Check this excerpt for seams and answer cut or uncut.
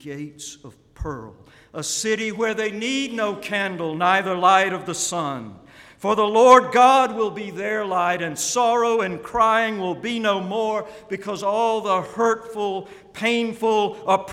uncut